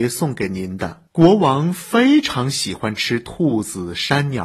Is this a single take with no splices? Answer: no; 1 cut; at 1.1 s

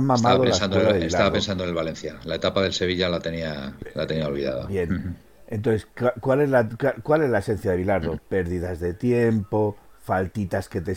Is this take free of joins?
yes; 0 cuts

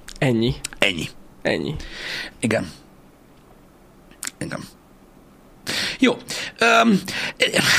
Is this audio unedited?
no; 1 cut; at 2.3 s

